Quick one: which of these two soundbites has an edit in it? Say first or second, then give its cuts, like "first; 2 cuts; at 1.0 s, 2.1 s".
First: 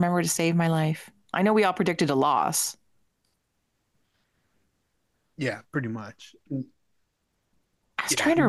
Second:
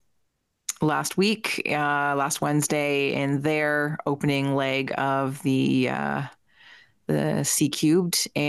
first; 1 cut; at 6.5 s